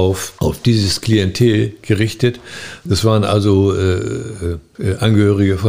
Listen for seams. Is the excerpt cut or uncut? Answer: cut